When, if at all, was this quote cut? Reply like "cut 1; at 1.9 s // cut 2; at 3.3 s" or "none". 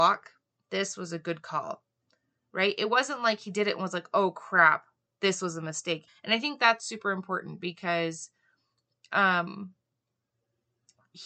cut 1; at 6.1 s

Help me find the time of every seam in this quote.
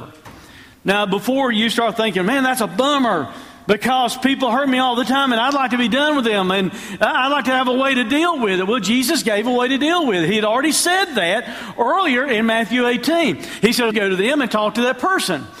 cut 1; at 13.9 s

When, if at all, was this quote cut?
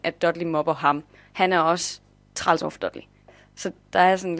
none

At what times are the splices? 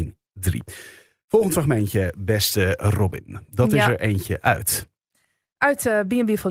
none

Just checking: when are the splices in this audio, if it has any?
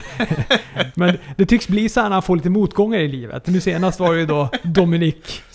none

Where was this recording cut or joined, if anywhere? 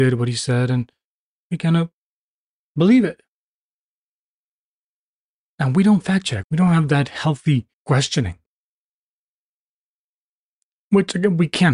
cut 1; at 6.4 s // cut 2; at 7.7 s

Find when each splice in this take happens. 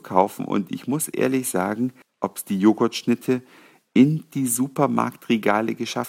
cut 1; at 2.0 s

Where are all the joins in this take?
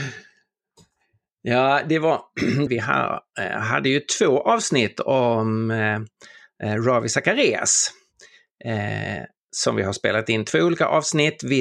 cut 1; at 2.7 s

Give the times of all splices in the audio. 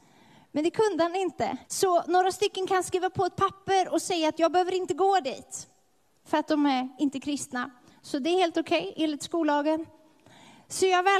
cut 1; at 1.6 s

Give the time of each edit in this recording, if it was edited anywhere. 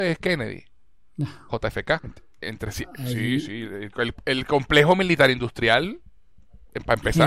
cut 1; at 2.0 s

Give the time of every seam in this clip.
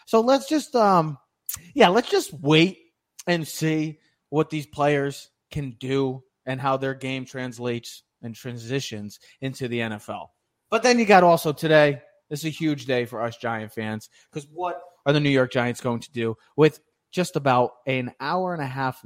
none

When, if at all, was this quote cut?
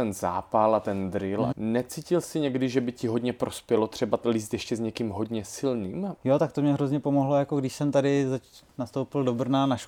cut 1; at 1.5 s // cut 2; at 6.2 s

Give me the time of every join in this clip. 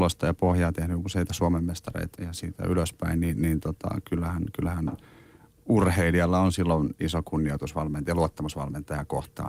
cut 1; at 2.2 s

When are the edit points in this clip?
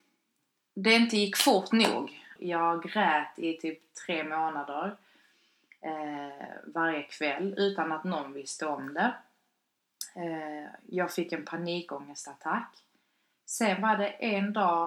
cut 1; at 2.4 s

